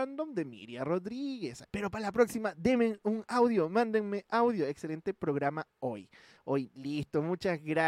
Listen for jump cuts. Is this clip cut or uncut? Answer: cut